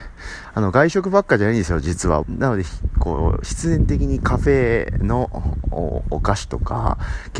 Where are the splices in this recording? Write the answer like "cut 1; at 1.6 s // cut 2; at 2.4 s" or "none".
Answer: cut 1; at 2.2 s